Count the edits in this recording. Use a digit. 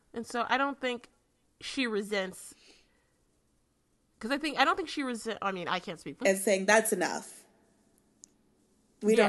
1